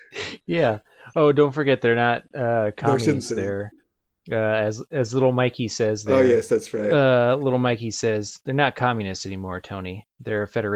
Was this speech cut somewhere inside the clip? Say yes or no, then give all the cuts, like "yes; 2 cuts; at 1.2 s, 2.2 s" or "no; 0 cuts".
no; 0 cuts